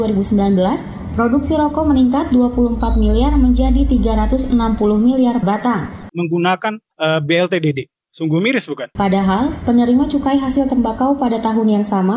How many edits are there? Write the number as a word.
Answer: two